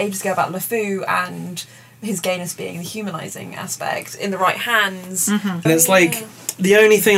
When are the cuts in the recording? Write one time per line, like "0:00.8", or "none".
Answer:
0:05.6